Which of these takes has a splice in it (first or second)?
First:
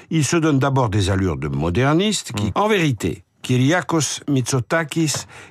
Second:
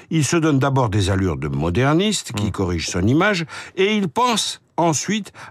first